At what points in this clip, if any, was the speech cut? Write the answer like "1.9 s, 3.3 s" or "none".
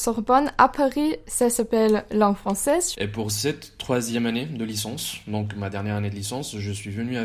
2.9 s